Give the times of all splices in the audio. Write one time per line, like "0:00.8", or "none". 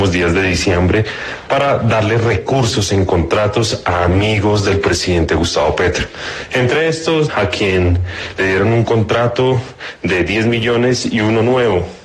0:07.3

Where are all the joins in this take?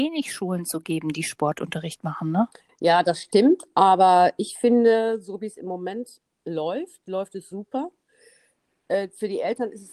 0:02.7

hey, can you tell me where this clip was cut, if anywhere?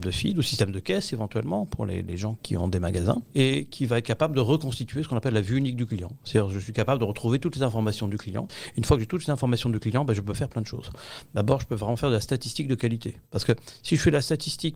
0:13.3

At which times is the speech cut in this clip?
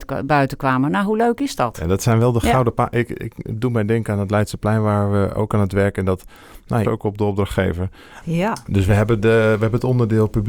0:06.8
0:08.2

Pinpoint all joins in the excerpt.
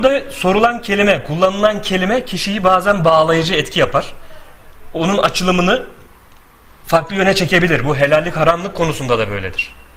none

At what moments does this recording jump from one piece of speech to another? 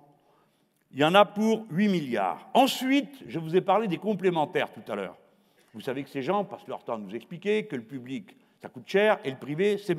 none

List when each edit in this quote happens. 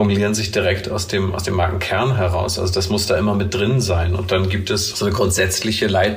none

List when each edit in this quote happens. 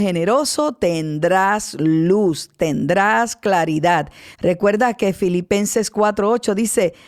0:04.3

